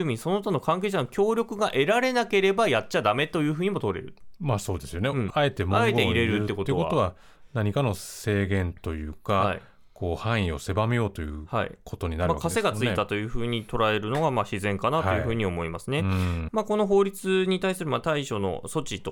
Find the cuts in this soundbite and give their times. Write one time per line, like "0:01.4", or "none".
0:05.3
0:16.5